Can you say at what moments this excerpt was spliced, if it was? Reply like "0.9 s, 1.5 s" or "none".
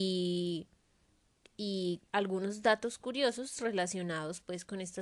2.1 s